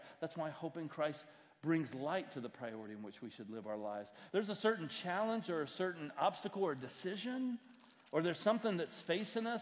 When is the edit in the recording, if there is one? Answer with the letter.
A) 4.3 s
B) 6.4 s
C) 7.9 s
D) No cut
A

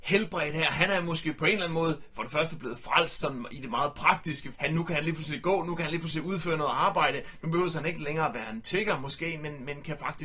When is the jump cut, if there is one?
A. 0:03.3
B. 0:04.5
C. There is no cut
B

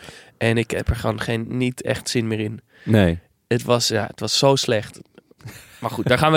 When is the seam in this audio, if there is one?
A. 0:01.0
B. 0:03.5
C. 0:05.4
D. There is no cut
D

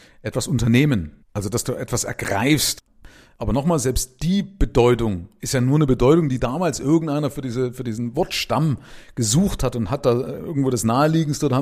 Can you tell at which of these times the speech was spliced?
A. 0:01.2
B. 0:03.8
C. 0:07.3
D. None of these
A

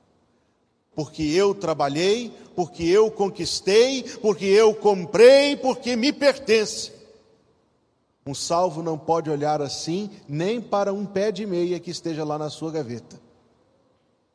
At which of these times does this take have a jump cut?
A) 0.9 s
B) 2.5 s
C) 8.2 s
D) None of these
A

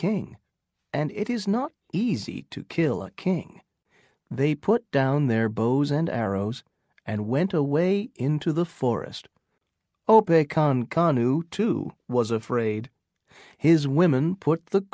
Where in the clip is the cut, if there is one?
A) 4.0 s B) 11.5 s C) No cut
C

